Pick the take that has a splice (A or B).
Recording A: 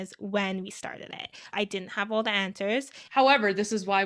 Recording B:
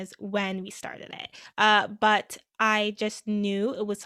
A